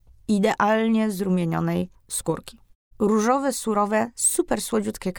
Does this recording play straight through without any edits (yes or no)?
no